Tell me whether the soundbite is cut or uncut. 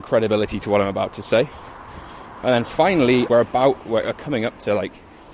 cut